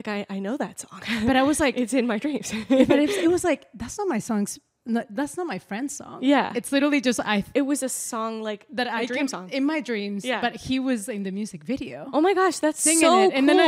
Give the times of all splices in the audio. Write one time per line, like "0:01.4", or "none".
none